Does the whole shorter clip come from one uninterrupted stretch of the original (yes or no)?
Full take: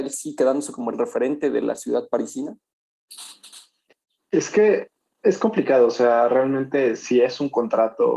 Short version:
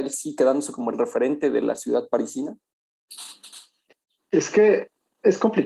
yes